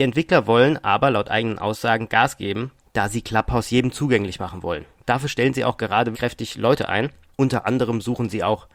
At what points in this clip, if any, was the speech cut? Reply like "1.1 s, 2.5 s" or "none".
6.1 s